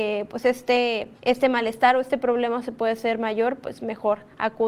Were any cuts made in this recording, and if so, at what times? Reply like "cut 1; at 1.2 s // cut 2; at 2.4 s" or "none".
cut 1; at 1.2 s